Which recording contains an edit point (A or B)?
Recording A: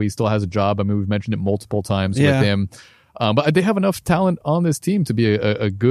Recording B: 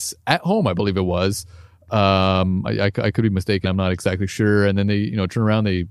B